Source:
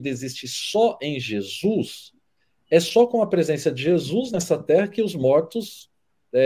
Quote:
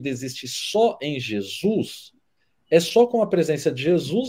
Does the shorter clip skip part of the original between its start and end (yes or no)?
no